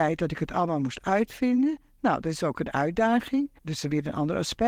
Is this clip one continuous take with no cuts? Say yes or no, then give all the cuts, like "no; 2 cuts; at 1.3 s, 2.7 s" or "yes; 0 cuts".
no; 1 cut; at 3.6 s